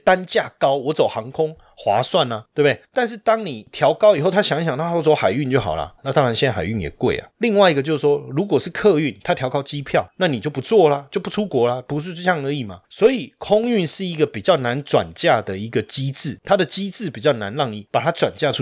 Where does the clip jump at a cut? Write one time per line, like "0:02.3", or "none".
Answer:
none